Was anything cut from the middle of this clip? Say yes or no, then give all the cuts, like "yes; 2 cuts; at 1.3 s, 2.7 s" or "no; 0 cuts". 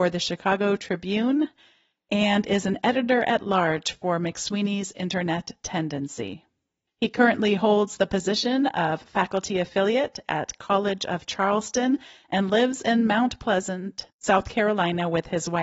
no; 0 cuts